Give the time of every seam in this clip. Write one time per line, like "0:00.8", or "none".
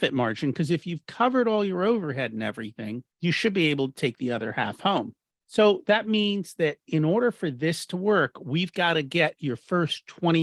0:03.1
0:05.4